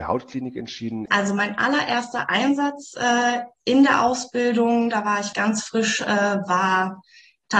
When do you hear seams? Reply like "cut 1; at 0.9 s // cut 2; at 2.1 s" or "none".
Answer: cut 1; at 5.3 s